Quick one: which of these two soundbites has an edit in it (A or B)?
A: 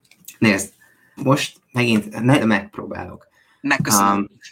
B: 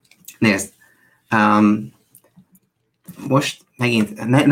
A